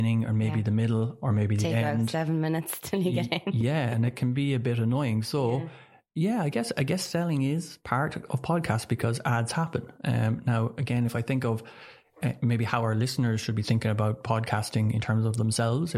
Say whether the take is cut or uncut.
uncut